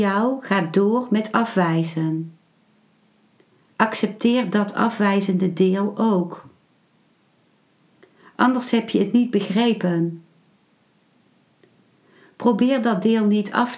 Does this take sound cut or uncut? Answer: uncut